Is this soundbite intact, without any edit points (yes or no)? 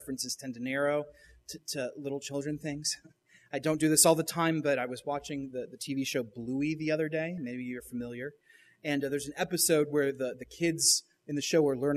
yes